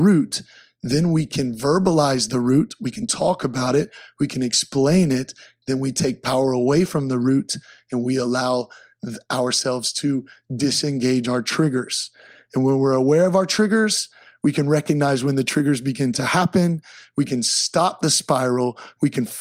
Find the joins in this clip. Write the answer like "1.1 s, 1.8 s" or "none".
none